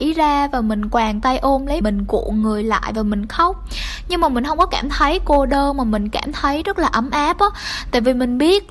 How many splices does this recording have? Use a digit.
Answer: 1